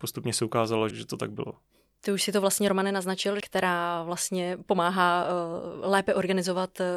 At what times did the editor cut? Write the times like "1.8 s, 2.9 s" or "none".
0.9 s, 3.4 s